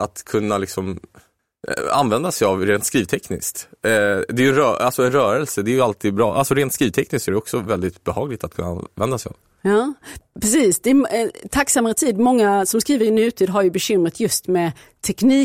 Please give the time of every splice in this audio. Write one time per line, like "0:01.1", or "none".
none